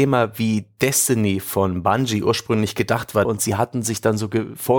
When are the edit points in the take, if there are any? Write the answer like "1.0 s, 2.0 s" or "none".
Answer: 3.2 s